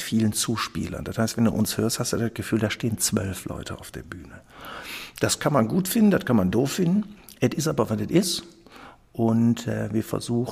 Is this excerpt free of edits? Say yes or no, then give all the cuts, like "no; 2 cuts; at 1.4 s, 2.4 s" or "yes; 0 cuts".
yes; 0 cuts